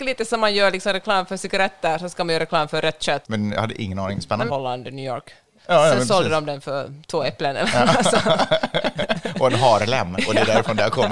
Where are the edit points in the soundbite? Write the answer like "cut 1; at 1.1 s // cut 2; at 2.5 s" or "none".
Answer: cut 1; at 3.2 s // cut 2; at 4.5 s